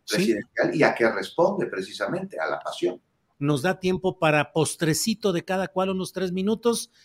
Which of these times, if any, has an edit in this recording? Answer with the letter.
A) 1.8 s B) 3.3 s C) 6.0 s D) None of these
B